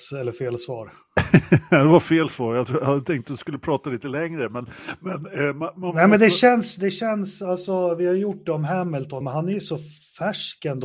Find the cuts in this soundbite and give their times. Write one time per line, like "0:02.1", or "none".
0:09.2